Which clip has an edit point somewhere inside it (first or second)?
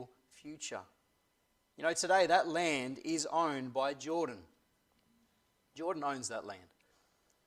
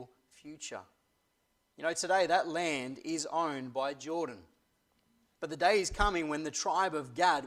second